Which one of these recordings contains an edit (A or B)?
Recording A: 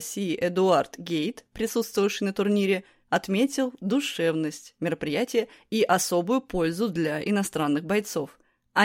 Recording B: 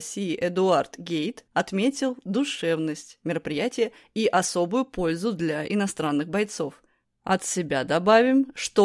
B